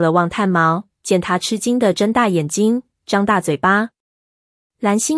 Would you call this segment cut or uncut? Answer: uncut